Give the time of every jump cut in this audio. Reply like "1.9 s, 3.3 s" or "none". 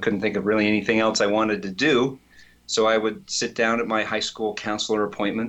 none